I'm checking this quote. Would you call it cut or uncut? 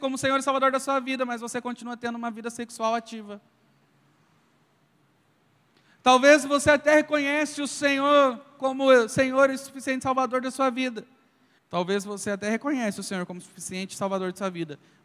cut